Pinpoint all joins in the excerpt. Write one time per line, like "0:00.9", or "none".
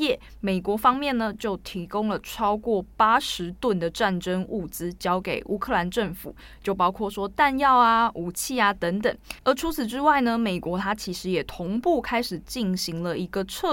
0:09.4